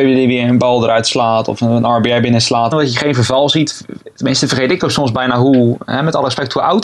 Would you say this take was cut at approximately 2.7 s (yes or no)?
yes